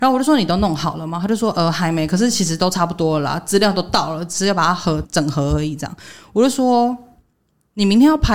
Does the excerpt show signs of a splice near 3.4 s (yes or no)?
no